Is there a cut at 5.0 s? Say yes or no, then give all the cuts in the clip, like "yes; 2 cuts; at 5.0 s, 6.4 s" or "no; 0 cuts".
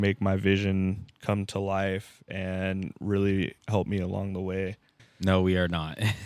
yes; 1 cut; at 5.0 s